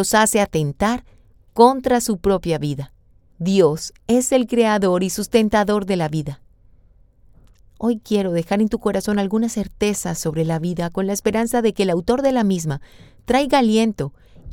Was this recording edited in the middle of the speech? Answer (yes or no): yes